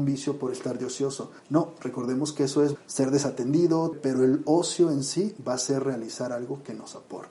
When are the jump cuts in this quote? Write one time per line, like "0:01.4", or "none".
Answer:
0:01.4
0:02.8
0:03.9